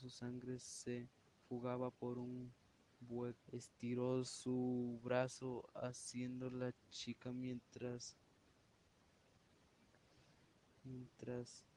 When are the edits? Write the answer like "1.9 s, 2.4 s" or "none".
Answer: 3.4 s